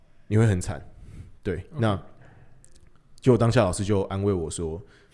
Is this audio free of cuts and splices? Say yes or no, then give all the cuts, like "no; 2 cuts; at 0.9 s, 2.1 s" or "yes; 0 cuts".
yes; 0 cuts